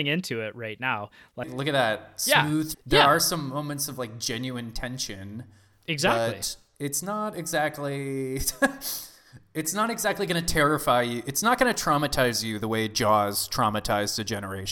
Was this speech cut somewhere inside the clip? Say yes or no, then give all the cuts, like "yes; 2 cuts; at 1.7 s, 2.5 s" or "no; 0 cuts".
yes; 2 cuts; at 1.4 s, 2.7 s